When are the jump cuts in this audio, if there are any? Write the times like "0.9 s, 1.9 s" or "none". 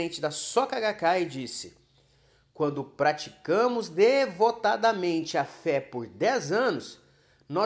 none